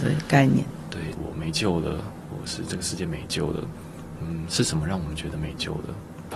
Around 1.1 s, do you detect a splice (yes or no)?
yes